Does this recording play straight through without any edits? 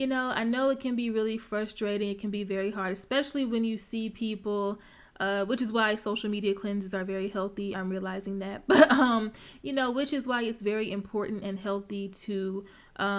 yes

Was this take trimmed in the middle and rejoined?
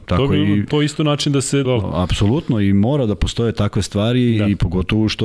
yes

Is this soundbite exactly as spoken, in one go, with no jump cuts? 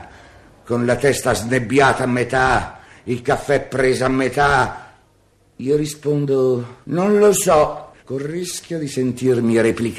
no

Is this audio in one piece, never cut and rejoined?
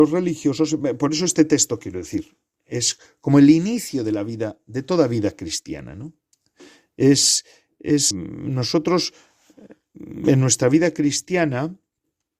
no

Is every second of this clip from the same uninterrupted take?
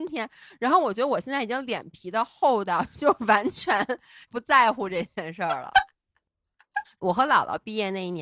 no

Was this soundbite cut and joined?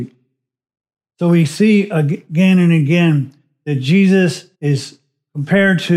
yes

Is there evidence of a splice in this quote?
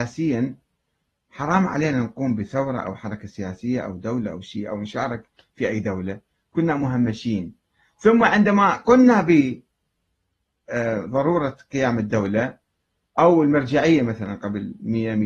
no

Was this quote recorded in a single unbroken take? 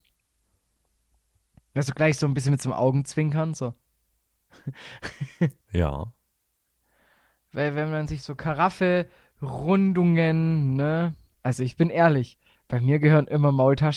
no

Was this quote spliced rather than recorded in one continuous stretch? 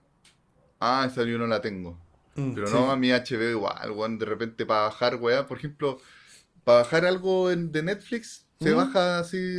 no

